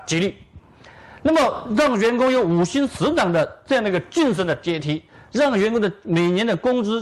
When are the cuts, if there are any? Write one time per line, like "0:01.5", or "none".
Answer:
none